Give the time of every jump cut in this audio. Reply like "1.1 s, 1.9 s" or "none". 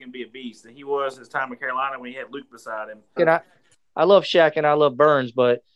3.2 s